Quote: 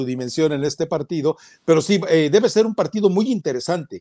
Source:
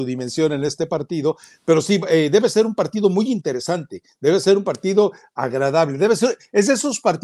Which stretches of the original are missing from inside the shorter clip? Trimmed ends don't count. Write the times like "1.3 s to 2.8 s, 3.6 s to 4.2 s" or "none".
none